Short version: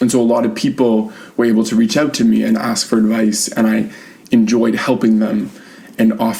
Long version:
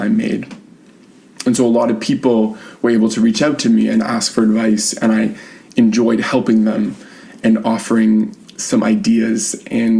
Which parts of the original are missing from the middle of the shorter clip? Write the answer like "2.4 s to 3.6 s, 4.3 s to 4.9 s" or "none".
none